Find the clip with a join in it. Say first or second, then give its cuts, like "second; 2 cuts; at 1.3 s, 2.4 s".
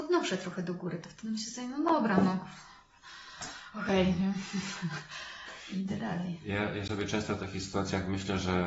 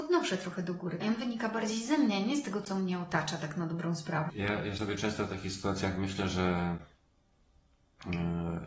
second; 2 cuts; at 1.0 s, 4.3 s